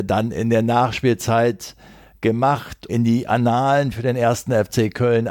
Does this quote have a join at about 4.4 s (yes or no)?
no